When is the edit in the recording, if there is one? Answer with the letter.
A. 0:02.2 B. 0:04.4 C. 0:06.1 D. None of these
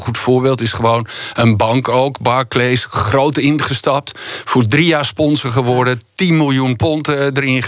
D